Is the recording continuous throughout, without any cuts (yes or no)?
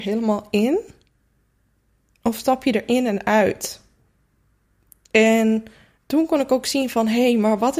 yes